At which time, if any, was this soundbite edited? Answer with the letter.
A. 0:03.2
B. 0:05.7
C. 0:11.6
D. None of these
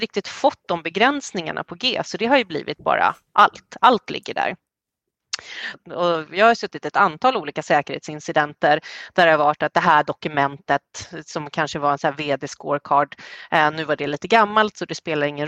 B